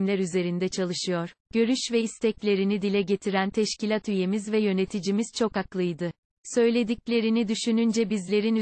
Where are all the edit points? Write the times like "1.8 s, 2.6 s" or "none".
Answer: 1.4 s